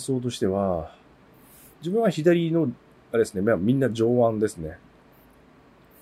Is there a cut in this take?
no; 0 cuts

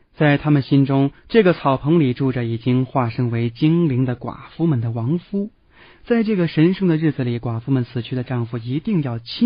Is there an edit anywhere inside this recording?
no; 0 cuts

